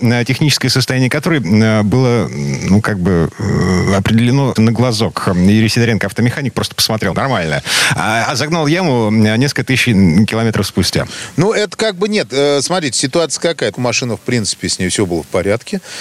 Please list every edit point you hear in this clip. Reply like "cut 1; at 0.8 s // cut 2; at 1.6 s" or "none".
cut 1; at 4.6 s // cut 2; at 7.1 s // cut 3; at 13.7 s